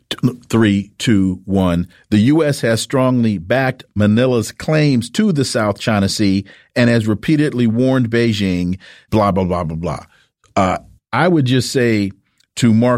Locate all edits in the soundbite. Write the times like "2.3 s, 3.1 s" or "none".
11.0 s